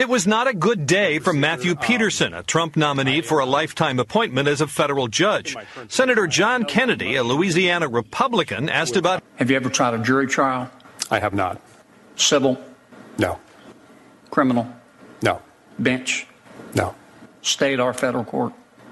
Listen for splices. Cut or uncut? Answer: cut